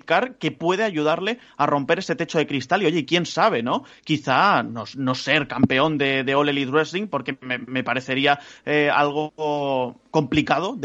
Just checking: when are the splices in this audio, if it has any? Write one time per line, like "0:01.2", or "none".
none